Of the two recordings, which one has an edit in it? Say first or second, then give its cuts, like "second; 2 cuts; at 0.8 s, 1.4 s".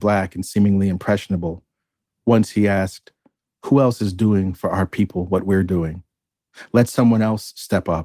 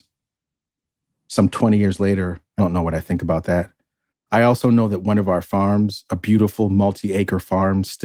second; 2 cuts; at 2.6 s, 4.1 s